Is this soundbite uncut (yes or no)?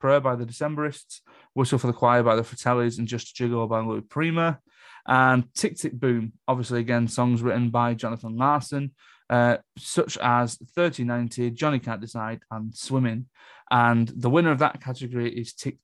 yes